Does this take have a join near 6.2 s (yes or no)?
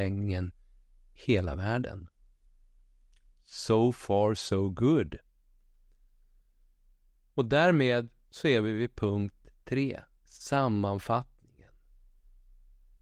no